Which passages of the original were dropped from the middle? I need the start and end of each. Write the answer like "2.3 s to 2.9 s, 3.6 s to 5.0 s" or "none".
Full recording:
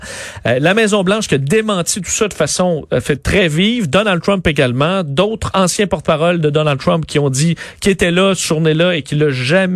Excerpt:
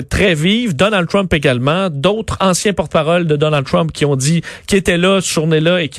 none